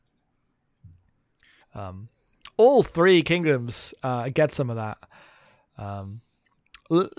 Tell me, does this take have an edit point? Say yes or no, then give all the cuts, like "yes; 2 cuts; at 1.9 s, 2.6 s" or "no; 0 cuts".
yes; 1 cut; at 1.6 s